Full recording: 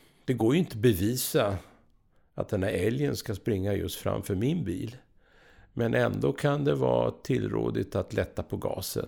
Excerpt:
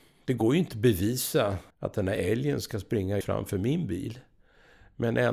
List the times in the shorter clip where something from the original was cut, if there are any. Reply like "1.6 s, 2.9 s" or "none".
1.7 s, 3.2 s